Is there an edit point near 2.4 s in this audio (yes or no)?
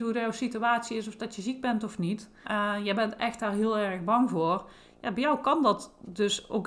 yes